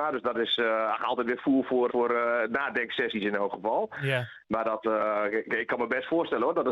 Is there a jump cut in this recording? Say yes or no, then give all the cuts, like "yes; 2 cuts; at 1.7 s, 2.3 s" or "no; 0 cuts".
yes; 1 cut; at 1.9 s